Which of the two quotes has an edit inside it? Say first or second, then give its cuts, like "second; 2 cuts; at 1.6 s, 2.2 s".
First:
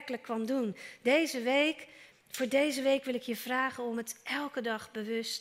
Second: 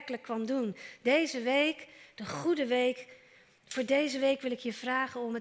first; 1 cut; at 2.1 s